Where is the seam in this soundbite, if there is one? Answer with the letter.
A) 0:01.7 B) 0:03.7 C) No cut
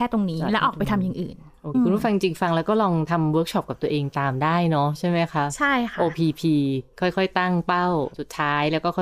A